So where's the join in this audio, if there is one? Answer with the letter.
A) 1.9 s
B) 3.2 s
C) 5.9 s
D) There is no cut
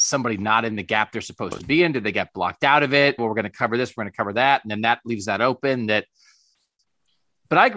B